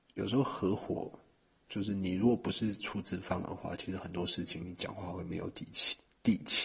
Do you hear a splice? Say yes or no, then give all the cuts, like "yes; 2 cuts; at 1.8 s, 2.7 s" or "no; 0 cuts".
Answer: no; 0 cuts